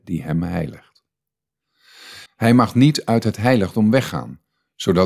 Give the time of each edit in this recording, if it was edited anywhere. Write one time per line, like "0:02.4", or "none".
0:02.3